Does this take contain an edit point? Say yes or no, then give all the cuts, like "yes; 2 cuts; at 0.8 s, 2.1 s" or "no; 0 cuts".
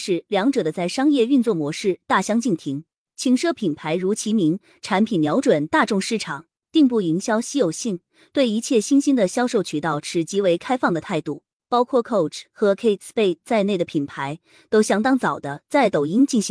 no; 0 cuts